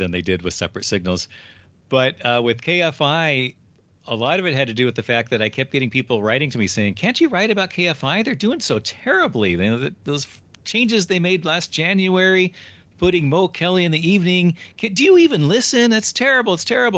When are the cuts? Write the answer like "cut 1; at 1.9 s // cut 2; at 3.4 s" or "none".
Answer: none